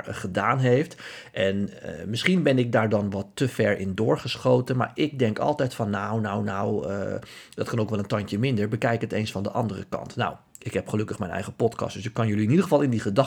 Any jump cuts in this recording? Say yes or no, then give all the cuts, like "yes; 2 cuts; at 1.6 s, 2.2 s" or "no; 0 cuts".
no; 0 cuts